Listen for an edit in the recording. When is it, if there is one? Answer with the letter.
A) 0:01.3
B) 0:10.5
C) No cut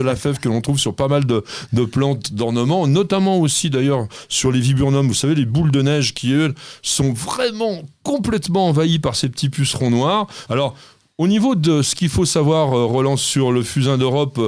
B